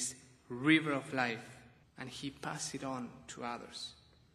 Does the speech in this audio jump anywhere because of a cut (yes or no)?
yes